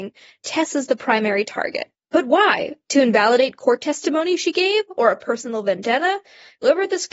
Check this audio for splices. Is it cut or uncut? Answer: uncut